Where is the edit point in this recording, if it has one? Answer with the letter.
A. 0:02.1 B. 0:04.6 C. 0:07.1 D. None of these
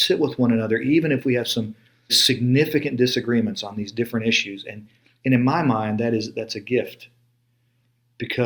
A